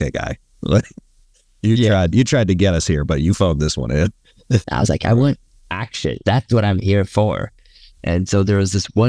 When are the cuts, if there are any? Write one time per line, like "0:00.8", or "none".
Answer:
0:04.6
0:06.2